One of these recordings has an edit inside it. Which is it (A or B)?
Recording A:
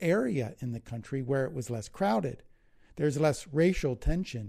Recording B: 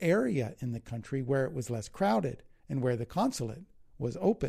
B